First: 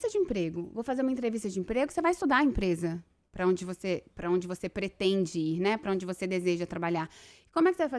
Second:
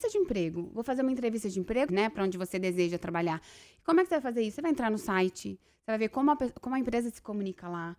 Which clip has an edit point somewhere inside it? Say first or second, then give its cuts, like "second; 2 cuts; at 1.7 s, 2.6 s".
second; 1 cut; at 1.9 s